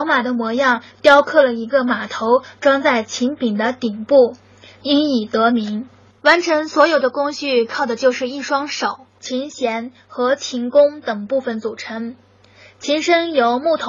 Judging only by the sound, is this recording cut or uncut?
cut